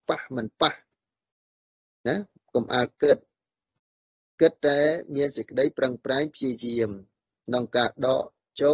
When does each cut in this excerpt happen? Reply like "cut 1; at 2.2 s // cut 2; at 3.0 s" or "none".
none